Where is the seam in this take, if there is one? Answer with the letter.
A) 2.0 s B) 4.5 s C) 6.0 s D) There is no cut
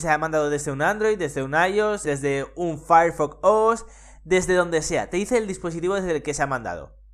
A